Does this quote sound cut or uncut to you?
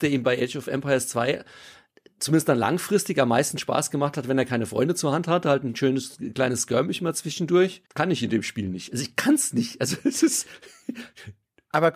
cut